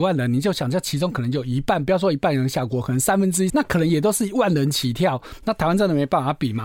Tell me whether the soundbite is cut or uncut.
cut